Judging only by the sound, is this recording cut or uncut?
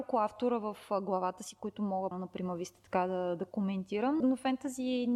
cut